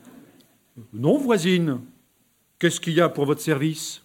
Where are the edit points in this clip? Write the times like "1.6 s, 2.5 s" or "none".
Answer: none